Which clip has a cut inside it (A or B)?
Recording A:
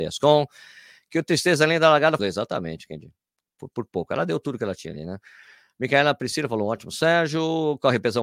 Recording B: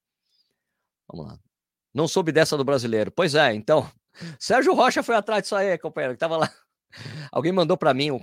A